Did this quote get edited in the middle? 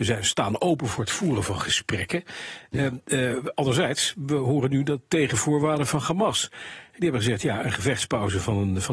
no; 0 cuts

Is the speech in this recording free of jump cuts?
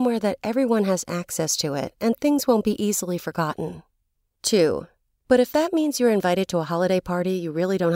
no; 1 cut; at 5.1 s

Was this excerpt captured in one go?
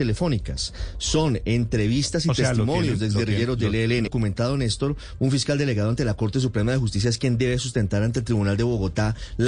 no; 2 cuts; at 4.1 s, 5.2 s

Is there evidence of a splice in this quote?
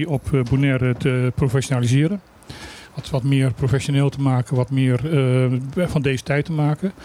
no; 0 cuts

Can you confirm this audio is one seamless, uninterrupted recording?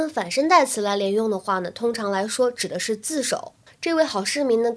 no; 1 cut; at 3.7 s

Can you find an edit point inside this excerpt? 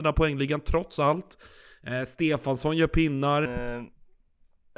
yes; 1 cut; at 3.5 s

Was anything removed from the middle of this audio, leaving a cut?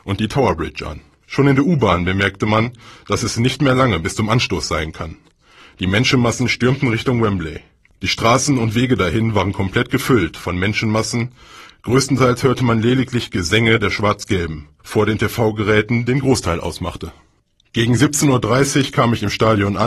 yes; 3 cuts; at 1.2 s, 8.0 s, 14.8 s

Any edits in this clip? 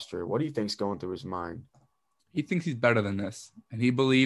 no; 0 cuts

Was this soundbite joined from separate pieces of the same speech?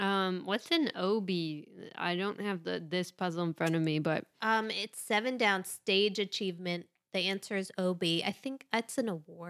no; 0 cuts

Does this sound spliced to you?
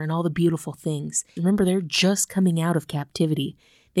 yes; 1 cut; at 1.4 s

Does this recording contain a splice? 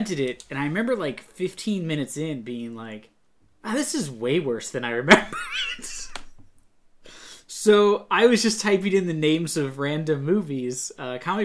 no; 0 cuts

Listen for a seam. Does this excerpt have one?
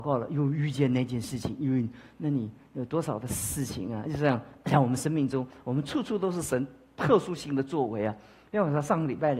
no; 0 cuts

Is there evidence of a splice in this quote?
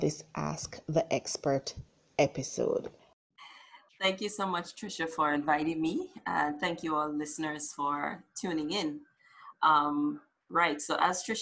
no; 0 cuts

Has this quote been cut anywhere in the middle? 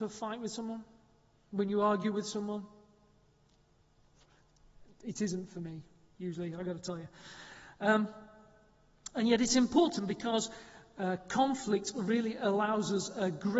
no; 0 cuts

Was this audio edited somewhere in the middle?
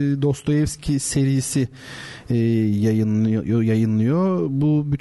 no; 0 cuts

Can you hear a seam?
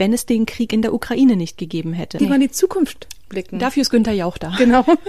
yes; 1 cut; at 2.2 s

